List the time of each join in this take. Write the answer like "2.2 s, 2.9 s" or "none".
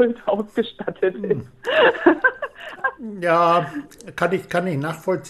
2.8 s